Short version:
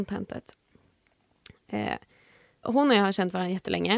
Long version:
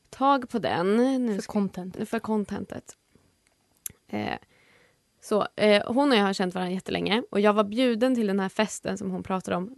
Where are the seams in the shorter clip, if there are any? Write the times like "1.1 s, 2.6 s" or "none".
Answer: 2.6 s